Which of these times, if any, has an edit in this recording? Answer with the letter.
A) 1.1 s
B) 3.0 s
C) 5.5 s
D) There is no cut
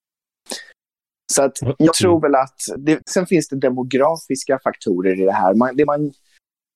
B